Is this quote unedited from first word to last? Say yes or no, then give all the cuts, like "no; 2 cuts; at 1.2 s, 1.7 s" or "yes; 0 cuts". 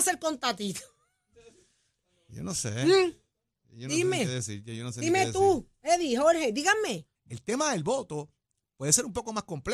no; 1 cut; at 7.1 s